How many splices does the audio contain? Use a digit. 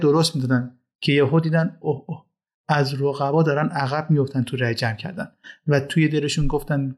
1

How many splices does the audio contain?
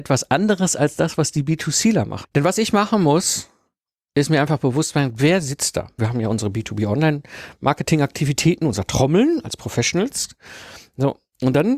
2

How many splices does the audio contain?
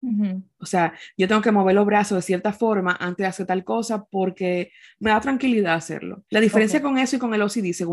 1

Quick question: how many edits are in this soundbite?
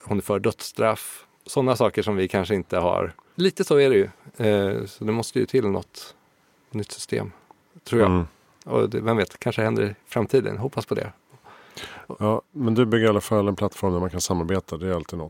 1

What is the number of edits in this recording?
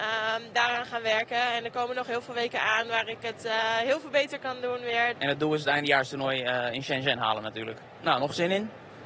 2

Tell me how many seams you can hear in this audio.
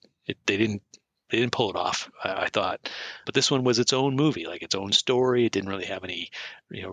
1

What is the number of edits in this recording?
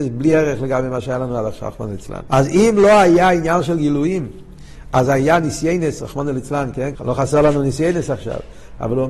2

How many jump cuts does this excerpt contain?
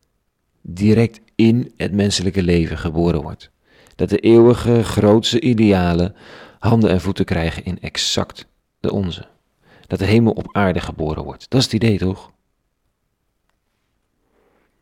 0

